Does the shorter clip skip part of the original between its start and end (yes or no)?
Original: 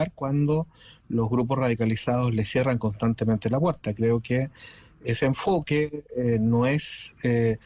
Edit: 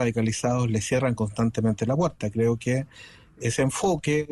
no